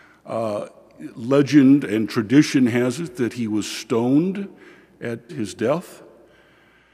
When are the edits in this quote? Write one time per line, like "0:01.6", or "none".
0:05.3

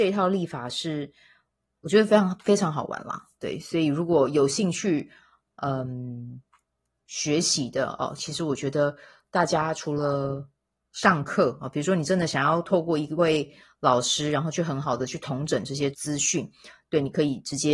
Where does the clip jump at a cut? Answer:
0:15.9

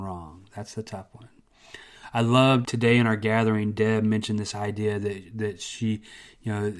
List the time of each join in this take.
0:02.6

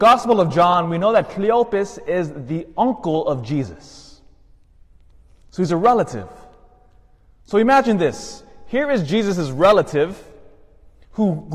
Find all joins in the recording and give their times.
none

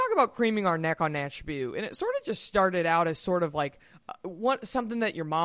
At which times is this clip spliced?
none

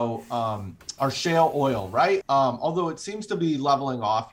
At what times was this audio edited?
0:01.0
0:02.2

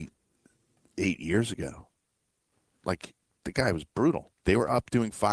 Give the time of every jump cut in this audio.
0:04.4

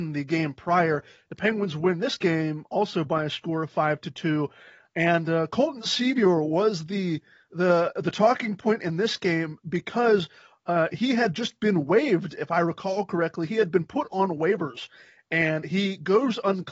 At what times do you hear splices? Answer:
none

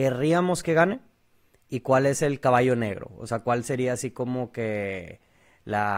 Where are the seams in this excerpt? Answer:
none

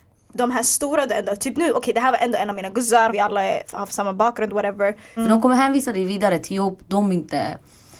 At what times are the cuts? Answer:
0:03.1
0:05.2

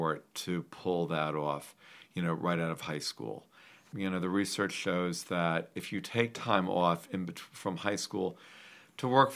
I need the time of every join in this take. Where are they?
none

